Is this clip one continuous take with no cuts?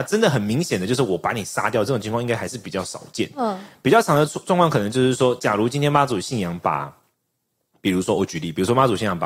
yes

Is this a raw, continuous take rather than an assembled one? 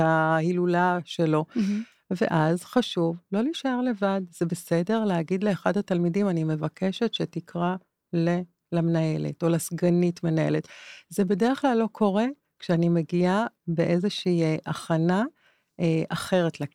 no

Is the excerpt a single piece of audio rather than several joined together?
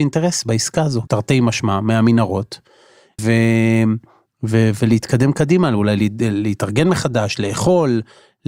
no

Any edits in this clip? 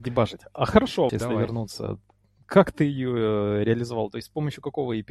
yes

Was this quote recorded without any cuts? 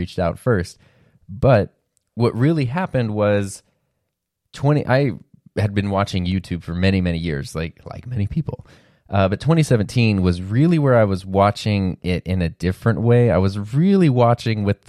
yes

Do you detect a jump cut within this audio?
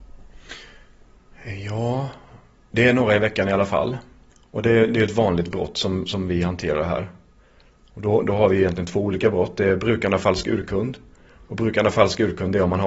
no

